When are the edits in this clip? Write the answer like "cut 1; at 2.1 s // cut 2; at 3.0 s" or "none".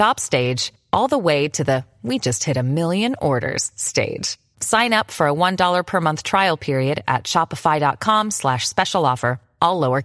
cut 1; at 4.5 s